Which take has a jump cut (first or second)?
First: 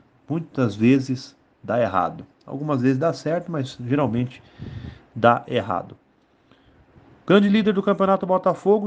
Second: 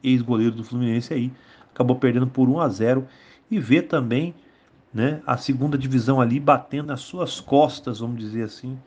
second